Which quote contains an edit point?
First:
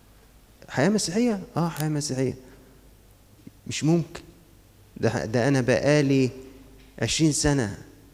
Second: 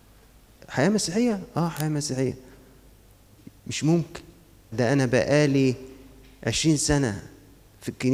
second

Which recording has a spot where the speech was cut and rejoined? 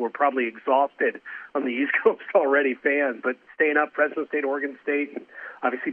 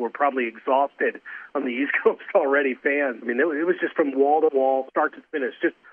second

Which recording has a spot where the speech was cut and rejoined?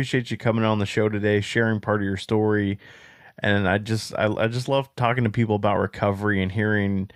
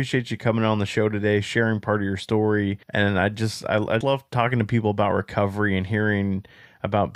second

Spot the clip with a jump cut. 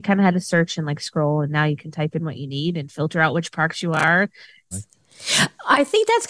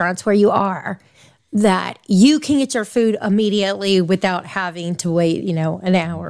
first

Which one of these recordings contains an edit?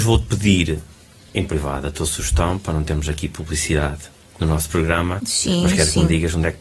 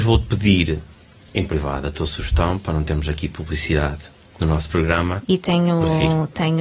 second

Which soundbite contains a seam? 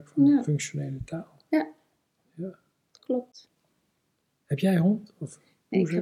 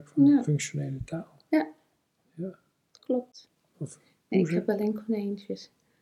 second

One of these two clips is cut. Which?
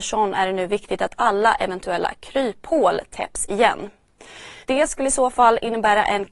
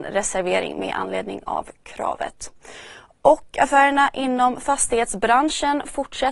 first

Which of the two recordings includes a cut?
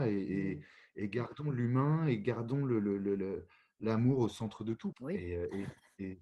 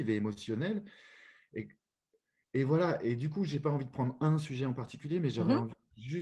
first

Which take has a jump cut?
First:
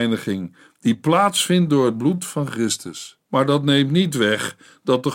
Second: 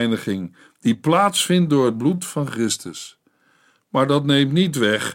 first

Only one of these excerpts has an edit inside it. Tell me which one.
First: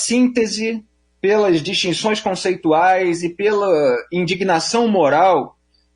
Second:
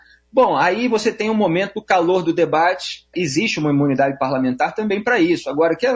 second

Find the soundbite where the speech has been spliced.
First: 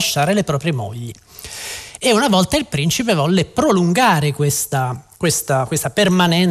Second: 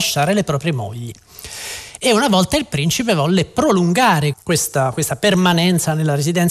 second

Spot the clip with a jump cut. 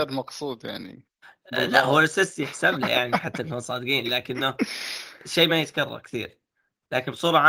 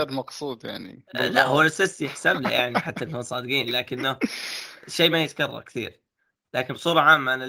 second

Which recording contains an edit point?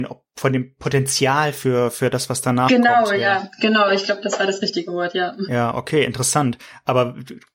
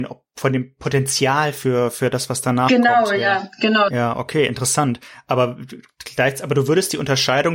second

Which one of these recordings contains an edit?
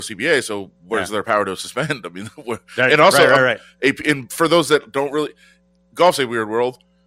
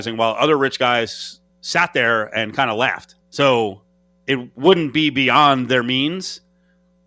second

